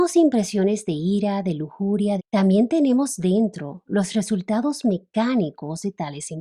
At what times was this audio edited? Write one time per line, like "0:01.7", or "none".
0:02.2